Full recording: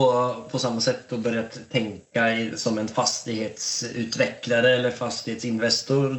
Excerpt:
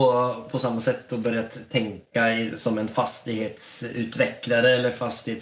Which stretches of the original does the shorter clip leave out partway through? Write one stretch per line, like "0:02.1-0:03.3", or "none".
none